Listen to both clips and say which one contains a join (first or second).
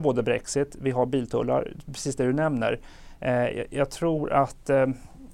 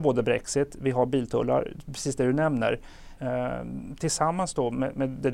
second